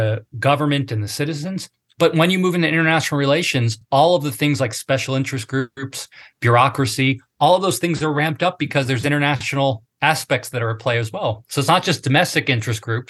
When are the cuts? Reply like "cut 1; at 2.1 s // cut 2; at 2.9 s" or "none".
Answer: none